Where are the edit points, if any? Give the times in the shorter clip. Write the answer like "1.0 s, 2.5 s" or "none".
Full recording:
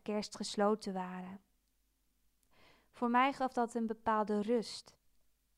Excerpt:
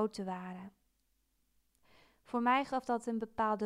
none